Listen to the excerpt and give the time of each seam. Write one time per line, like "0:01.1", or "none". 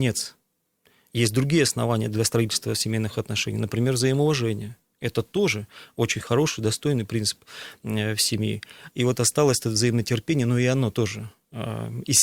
0:08.9